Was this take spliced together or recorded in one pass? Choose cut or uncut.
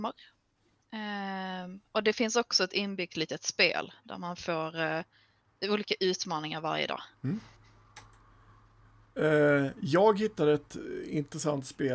cut